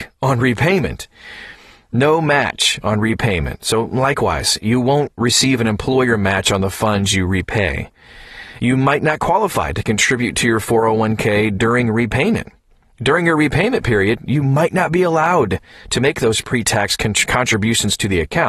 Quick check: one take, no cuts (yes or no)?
yes